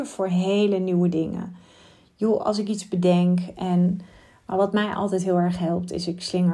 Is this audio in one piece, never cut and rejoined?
yes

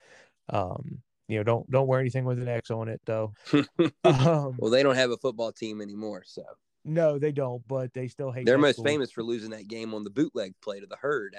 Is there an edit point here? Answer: yes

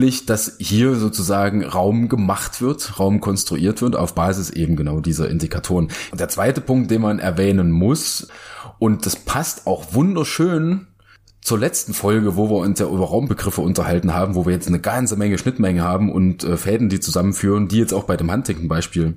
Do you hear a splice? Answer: yes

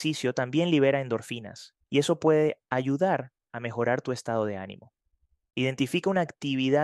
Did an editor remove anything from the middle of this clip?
yes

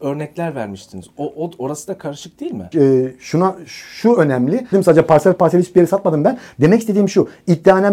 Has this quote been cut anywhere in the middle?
yes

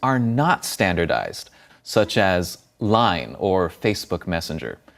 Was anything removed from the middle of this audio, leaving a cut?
yes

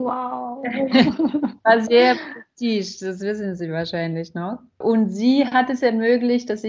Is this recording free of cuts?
yes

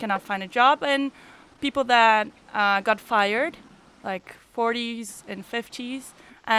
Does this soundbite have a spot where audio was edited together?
no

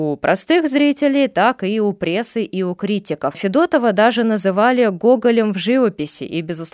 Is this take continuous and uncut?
yes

